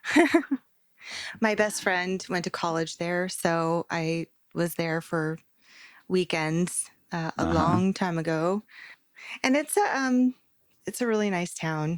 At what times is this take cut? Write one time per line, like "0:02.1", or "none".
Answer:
0:08.9